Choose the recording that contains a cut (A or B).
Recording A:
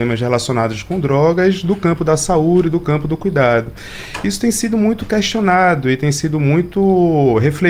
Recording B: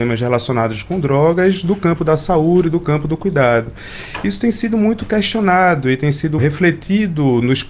B